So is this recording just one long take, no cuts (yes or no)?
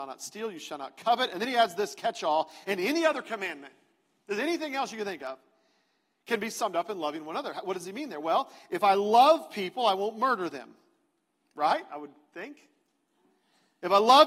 yes